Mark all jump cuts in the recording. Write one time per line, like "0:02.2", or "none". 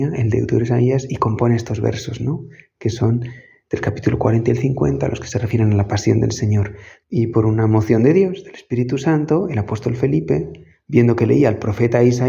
0:07.0